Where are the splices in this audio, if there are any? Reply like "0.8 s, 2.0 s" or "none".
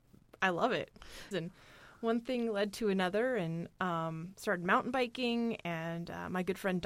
1.3 s